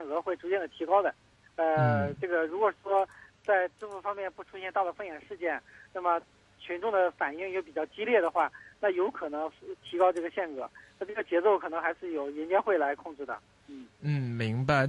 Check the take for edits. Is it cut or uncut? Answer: uncut